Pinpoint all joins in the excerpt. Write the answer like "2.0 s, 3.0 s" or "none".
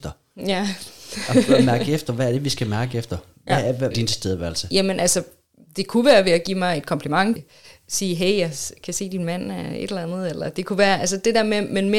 3.9 s, 7.4 s